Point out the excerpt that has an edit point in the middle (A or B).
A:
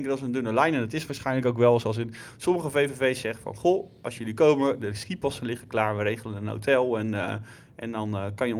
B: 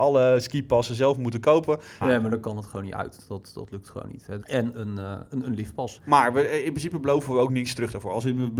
B